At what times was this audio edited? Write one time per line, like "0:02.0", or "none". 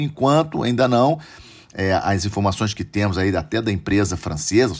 none